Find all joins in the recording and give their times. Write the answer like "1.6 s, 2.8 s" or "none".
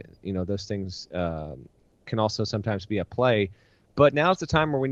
3.9 s